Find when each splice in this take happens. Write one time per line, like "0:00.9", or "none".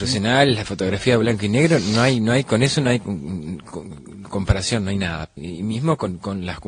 0:05.4